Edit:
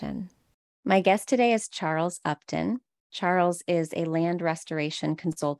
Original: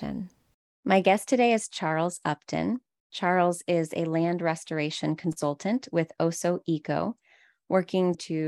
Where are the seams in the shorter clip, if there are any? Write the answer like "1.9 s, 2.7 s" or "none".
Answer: none